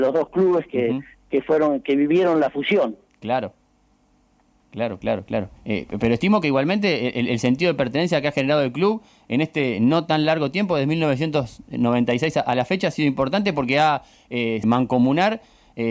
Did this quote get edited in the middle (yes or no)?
yes